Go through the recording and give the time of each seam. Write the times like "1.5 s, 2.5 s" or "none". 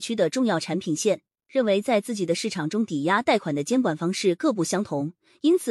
1.4 s